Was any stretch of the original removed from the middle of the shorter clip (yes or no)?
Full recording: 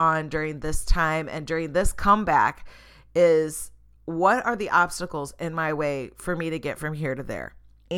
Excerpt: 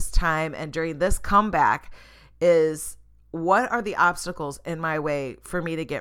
no